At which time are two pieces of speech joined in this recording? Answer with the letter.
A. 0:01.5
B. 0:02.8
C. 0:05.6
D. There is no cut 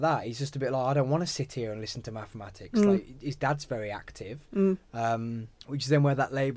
C